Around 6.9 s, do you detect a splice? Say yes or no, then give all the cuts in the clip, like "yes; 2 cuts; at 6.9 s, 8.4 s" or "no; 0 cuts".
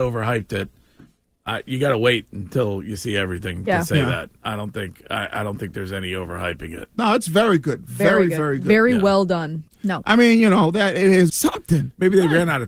no; 2 cuts; at 9.7 s, 11.3 s